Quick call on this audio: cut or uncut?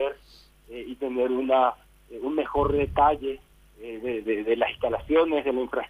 cut